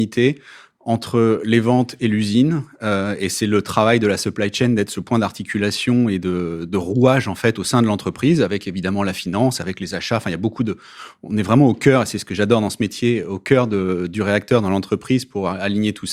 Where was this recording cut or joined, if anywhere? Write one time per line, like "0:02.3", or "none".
none